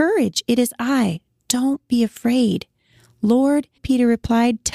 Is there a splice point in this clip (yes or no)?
yes